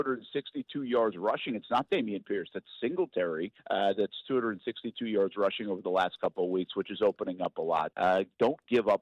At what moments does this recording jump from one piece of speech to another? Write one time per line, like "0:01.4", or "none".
0:03.6
0:07.9